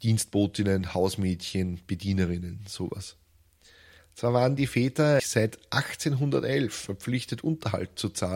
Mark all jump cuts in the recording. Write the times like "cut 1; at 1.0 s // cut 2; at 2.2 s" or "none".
cut 1; at 5.2 s